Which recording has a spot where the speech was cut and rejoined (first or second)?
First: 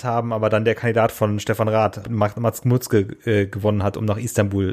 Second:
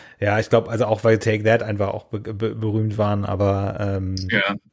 first